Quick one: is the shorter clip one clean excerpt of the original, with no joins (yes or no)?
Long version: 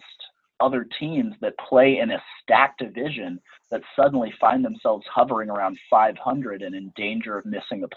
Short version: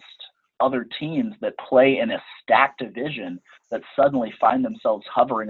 yes